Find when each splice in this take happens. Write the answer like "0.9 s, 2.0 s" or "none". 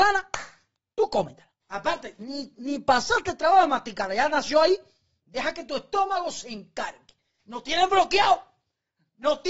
1.6 s, 7.4 s